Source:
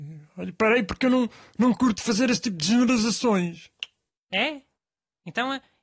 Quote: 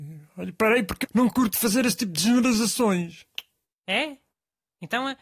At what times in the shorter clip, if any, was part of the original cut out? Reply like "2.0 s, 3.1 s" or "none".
1.0 s

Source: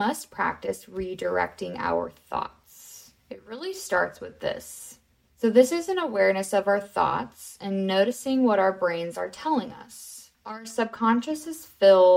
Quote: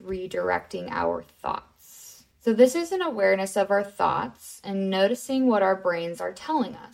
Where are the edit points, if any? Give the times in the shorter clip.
2.3 s

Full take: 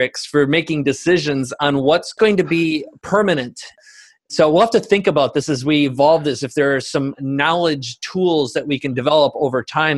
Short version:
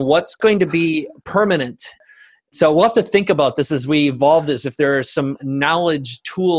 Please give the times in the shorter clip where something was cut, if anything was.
none

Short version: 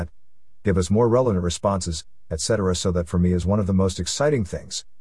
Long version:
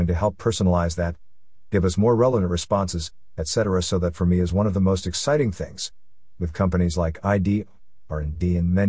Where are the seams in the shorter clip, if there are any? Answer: none

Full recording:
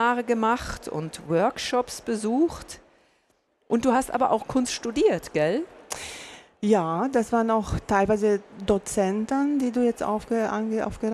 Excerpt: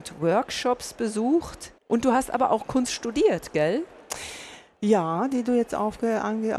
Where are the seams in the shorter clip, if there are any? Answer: 1.8 s, 5.3 s

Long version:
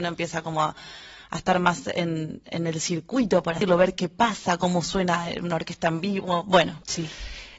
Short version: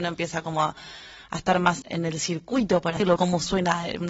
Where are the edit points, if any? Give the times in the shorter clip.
1.8 s, 3.2 s

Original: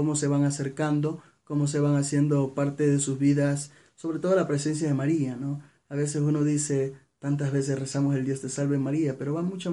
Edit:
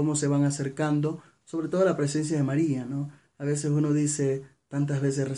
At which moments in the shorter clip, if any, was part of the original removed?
1.4 s

